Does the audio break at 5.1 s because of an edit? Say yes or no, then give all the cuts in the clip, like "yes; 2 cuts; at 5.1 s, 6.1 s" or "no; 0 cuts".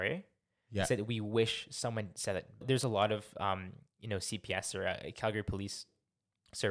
no; 1 cut; at 2.6 s